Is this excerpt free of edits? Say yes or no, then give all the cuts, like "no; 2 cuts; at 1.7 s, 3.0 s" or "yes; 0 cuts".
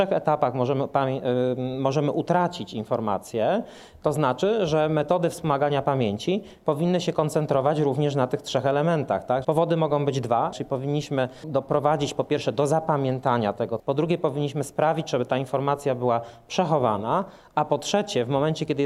no; 3 cuts; at 9.4 s, 10.5 s, 13.8 s